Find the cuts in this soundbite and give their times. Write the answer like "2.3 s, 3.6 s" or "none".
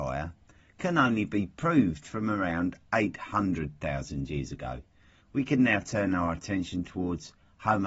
5.2 s